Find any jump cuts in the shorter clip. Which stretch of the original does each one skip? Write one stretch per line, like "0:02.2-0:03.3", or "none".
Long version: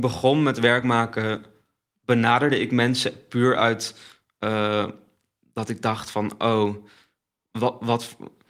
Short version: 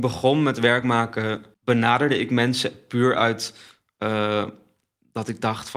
0:01.5-0:01.9